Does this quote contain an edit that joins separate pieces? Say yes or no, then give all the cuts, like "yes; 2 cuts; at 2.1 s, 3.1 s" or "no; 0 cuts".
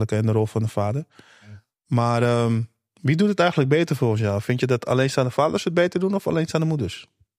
no; 0 cuts